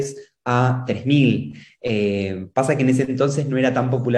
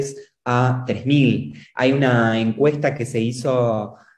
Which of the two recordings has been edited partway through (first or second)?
second